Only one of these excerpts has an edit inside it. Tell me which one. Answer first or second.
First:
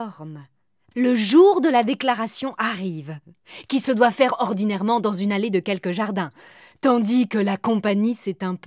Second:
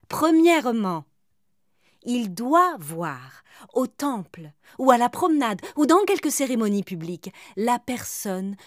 first